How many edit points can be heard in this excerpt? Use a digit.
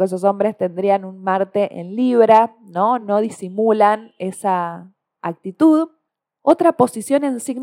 0